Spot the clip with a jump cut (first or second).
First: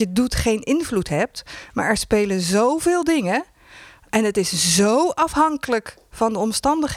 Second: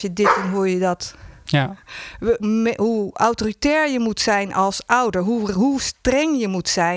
second